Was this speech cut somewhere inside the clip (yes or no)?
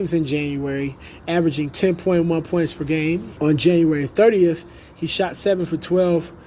yes